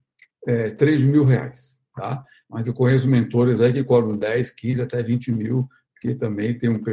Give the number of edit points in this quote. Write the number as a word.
one